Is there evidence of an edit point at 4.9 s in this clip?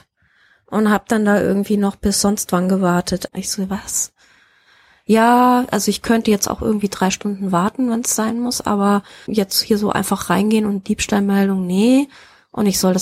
no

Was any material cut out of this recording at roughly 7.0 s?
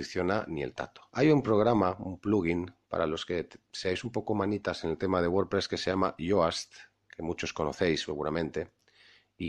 no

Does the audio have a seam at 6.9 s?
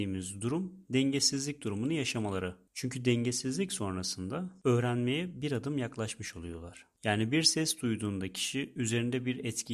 yes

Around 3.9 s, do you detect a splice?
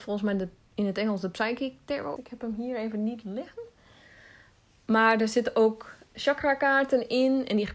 no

